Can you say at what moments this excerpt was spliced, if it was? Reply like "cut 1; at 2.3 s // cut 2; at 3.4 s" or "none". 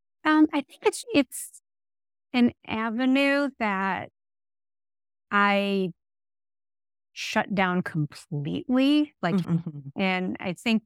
cut 1; at 1.0 s // cut 2; at 9.4 s

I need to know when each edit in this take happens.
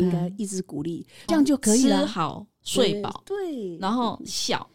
cut 1; at 1.3 s

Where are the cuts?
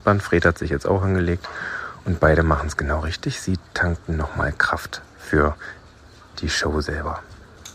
none

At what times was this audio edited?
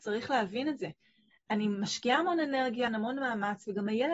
cut 1; at 1.3 s // cut 2; at 2.9 s

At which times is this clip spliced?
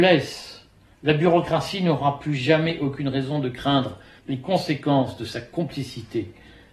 cut 1; at 0.9 s

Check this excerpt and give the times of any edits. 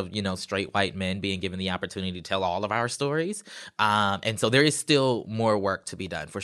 none

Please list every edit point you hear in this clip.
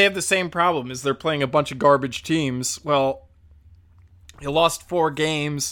none

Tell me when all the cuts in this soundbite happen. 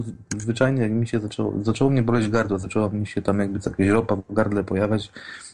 none

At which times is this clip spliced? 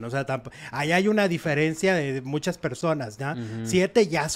none

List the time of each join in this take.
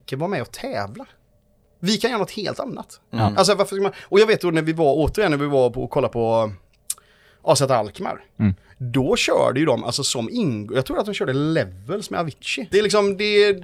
cut 1; at 12.7 s

